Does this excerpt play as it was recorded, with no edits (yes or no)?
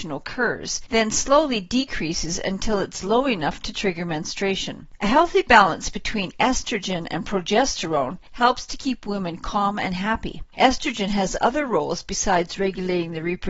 no